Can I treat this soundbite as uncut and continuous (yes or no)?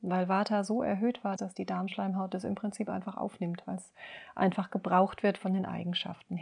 no